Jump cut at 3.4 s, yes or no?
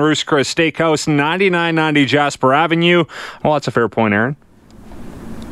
yes